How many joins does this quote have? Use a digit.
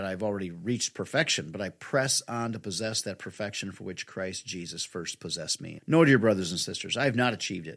1